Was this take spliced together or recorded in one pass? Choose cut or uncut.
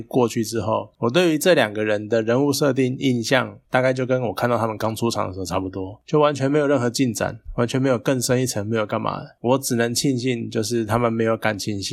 uncut